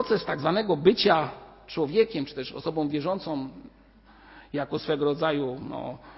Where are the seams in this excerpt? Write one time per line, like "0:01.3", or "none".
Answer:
none